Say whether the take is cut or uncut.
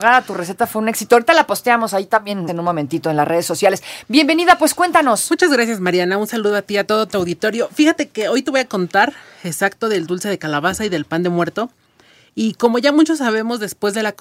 cut